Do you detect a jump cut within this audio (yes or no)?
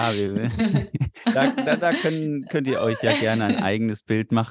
yes